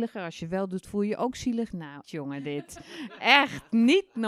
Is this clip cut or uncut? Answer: cut